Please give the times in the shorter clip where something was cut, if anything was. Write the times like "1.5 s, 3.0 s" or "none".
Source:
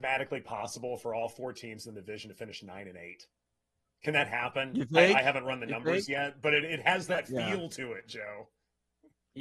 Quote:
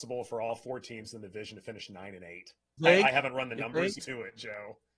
2.8 s, 4.0 s